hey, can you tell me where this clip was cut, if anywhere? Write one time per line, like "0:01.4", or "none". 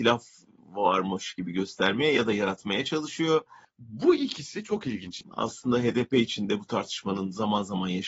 0:03.6
0:05.2